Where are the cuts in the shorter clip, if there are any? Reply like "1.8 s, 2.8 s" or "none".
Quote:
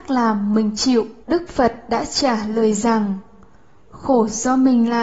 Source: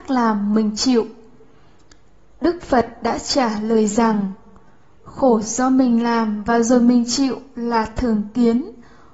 1.2 s